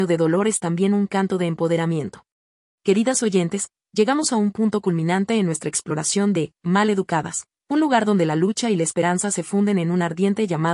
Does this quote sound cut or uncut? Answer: cut